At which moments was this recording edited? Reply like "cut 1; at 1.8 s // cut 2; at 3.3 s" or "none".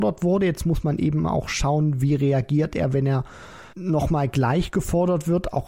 cut 1; at 3.7 s

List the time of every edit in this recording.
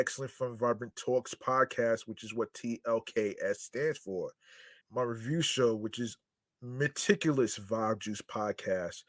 cut 1; at 4.8 s

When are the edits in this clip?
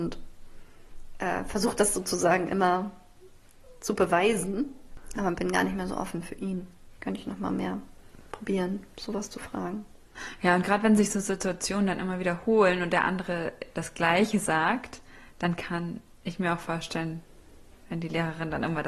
cut 1; at 7.0 s

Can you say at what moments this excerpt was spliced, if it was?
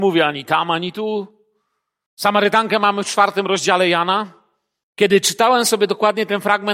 cut 1; at 2.1 s // cut 2; at 4.8 s

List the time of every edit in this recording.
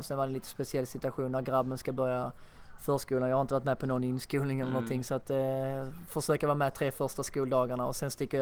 none

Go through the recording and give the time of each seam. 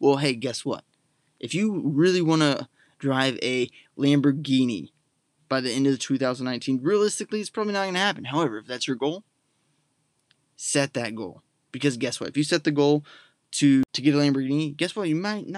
none

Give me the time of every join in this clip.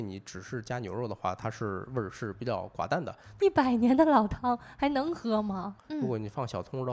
cut 1; at 3.4 s // cut 2; at 5.8 s

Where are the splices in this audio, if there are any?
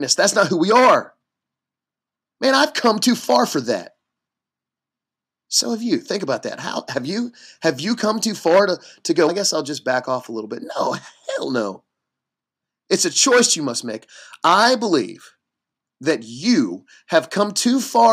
cut 1; at 9.3 s

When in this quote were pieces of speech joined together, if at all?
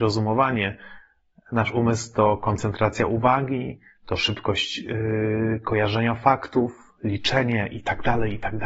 none

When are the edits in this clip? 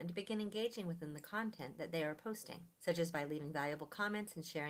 none

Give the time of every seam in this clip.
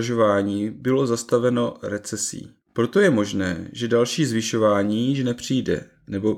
cut 1; at 2.6 s

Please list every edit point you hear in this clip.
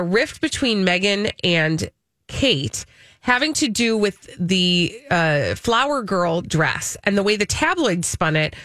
none

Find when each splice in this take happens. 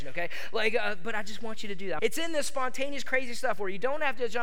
cut 1; at 2.0 s

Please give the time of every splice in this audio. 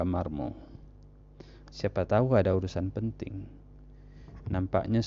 cut 1; at 1.7 s

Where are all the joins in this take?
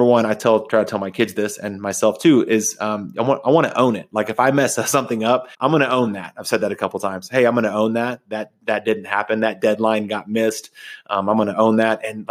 cut 1; at 5.5 s

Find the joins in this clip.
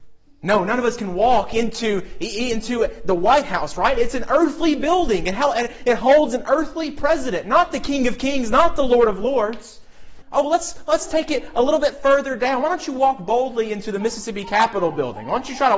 cut 1; at 10.2 s

